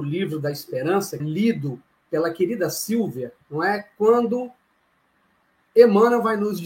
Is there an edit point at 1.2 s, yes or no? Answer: yes